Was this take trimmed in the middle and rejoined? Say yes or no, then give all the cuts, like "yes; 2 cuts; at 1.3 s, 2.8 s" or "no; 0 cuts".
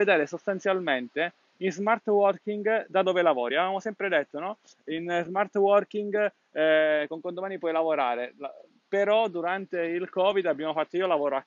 no; 0 cuts